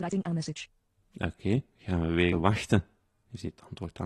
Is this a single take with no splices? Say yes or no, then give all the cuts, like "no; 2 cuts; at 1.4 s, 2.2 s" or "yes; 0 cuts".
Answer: no; 1 cut; at 2.3 s